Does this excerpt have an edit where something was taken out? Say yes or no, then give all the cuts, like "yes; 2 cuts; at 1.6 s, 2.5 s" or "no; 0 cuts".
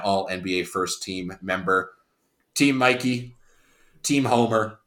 no; 0 cuts